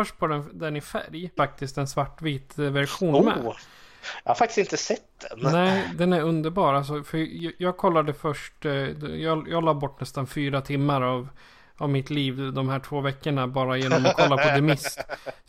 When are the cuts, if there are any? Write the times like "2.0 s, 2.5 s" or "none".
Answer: 1.4 s, 5.9 s